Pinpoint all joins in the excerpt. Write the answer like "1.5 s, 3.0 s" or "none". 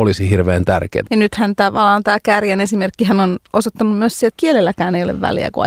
1.0 s, 4.3 s